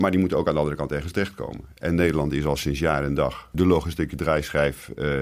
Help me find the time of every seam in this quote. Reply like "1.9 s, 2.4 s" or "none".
3.5 s